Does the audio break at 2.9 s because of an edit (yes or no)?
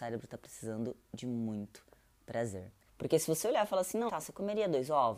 yes